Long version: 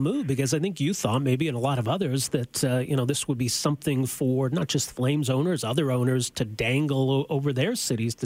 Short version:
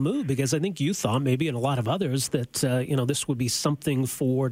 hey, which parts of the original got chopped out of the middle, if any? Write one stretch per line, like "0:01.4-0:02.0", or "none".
none